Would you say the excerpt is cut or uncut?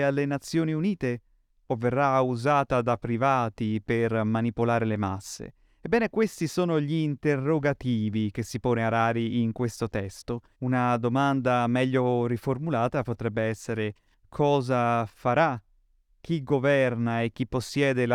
cut